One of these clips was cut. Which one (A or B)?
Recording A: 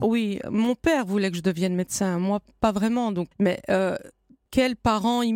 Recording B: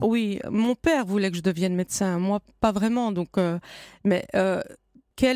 A